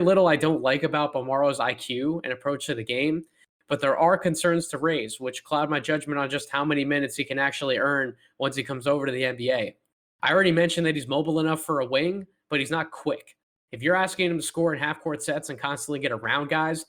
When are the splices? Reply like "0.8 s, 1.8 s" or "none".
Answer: none

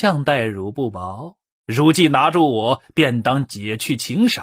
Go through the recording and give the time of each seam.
1.5 s

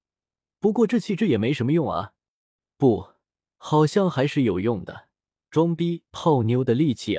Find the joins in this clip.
none

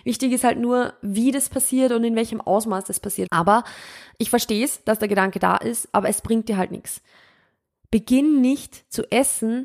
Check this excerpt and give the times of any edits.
3.3 s

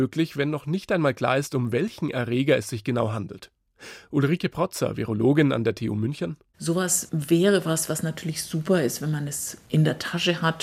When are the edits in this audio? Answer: none

